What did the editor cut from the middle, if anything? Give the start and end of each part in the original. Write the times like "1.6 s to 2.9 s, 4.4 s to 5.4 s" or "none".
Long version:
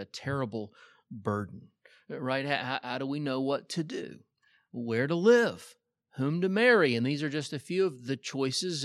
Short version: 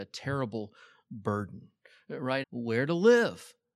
2.4 s to 4.6 s